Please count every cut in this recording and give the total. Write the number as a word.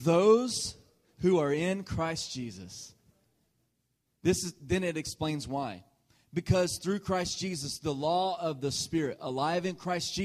zero